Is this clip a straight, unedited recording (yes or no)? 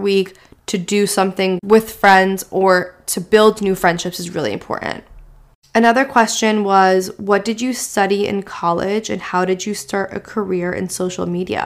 yes